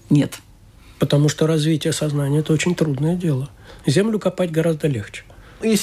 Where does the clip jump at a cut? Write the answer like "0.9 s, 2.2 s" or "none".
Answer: 3.8 s

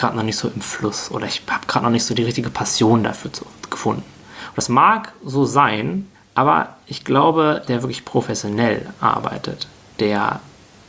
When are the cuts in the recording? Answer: 6.1 s, 7.7 s

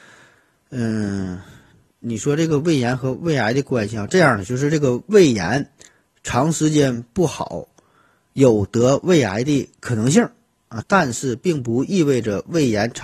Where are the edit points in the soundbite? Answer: 4.1 s, 10.8 s

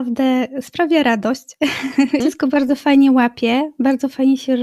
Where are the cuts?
2.2 s

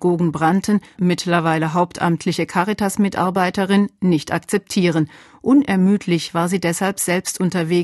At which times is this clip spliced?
1.0 s

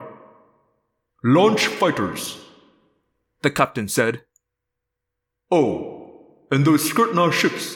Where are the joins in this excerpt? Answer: 1.1 s

